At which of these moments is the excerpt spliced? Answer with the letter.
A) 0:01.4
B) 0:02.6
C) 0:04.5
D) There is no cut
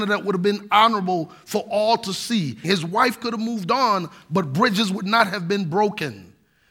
B